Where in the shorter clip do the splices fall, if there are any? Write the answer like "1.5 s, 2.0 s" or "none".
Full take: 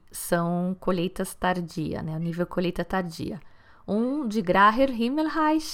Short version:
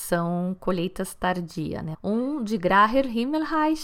1.9 s